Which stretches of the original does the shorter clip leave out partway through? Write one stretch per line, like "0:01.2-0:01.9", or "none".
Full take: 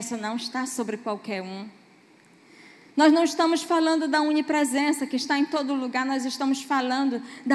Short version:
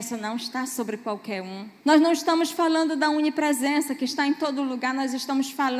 0:01.8-0:02.9

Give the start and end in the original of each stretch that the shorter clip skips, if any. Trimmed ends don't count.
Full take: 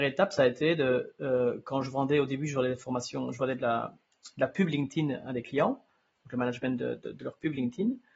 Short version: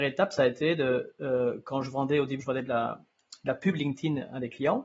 0:02.4-0:03.3

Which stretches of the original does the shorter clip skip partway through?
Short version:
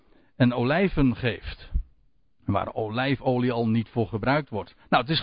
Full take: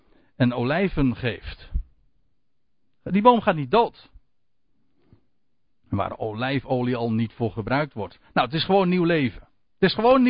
0:02.3-0:05.8

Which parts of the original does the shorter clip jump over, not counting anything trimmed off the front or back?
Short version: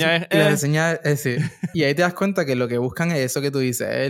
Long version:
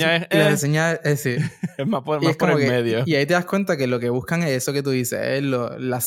0:01.7-0:03.1

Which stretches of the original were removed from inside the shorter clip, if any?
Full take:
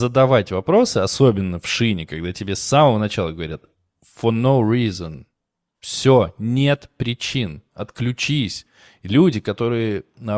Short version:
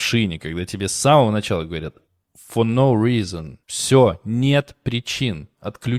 0:05.3-0:05.8

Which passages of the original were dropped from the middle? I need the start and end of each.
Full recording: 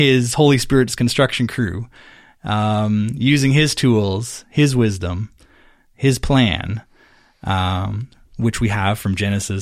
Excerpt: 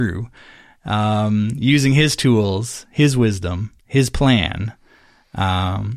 0:05.4-0:05.9

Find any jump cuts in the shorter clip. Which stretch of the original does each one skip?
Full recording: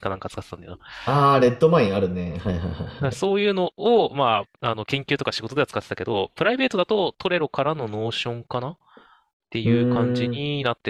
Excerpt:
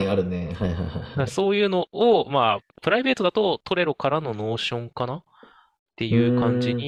0:04.6-0:06.3

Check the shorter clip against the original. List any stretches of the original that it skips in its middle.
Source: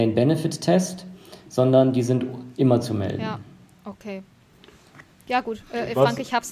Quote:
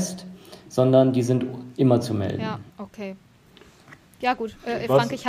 0:03.5-0:03.8

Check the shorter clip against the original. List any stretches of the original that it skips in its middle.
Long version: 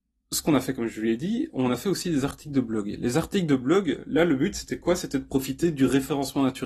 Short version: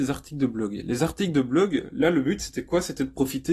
none

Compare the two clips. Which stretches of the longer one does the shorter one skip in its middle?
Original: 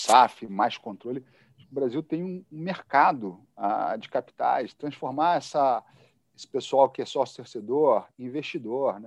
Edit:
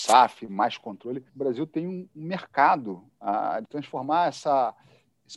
0:01.3-0:01.6
0:04.0-0:04.7

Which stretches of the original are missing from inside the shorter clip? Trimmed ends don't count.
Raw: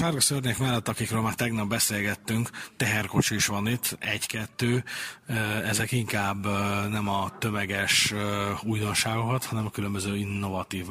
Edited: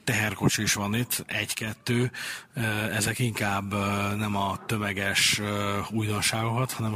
none

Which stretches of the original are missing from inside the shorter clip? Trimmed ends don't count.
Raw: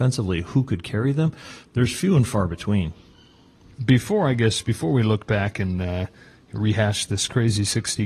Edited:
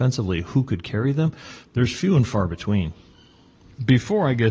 none

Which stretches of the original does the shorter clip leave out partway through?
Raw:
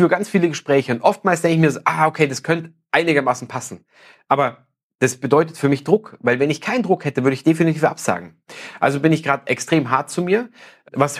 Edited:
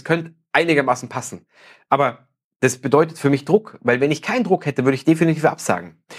none

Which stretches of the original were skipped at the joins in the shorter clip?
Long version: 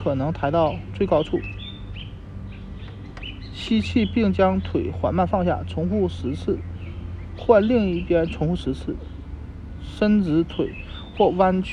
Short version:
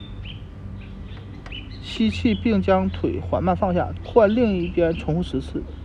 0:05.7-0:07.3

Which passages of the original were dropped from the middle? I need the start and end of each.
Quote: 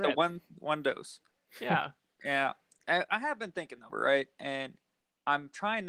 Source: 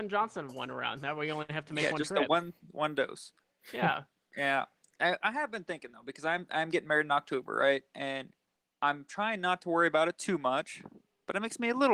0:06.0-0:07.5

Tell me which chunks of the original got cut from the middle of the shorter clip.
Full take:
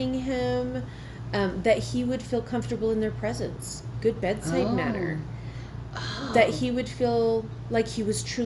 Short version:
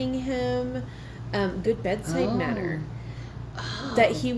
0:01.6-0:04.0

